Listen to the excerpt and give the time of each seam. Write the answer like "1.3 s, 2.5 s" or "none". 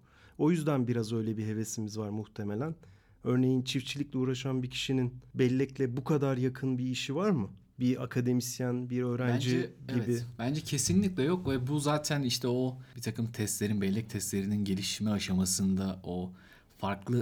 none

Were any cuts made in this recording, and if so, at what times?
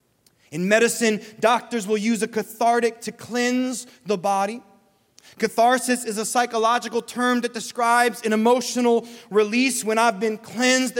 none

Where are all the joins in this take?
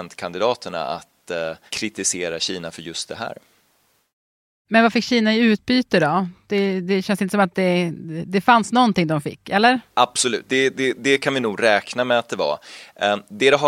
9.9 s

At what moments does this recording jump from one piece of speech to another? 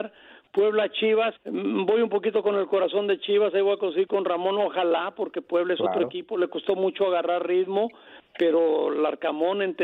1.4 s

